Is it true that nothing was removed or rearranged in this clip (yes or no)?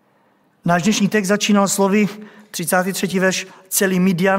yes